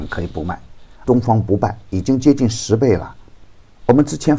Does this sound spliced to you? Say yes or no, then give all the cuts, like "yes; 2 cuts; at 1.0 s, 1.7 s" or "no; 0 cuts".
yes; 1 cut; at 1.0 s